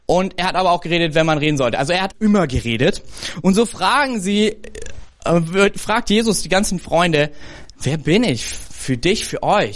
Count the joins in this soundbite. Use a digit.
1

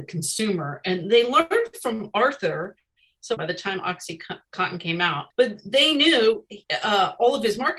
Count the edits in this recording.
2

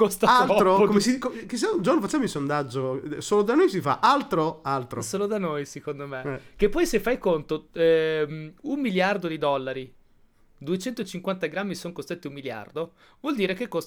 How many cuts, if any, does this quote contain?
0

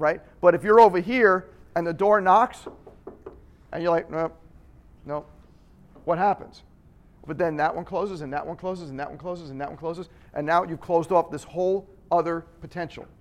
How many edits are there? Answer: 1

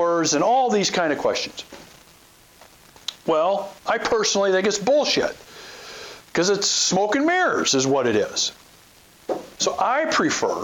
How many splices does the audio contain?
1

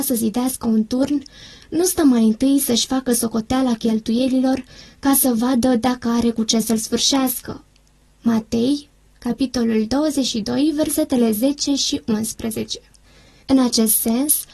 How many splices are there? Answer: 2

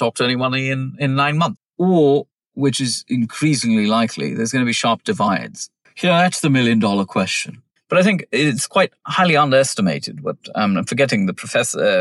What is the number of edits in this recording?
3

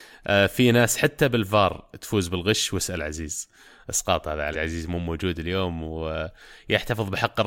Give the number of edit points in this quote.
1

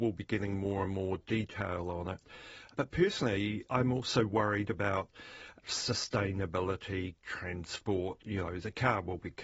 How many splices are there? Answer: 1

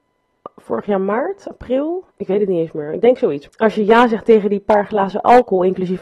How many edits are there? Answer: 2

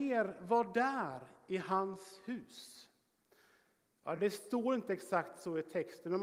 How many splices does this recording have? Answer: 0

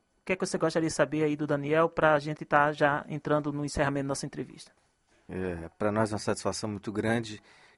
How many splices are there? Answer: 1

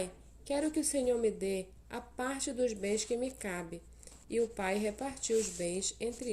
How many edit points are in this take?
0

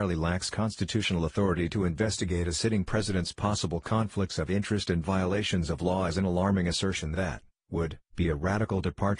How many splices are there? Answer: 1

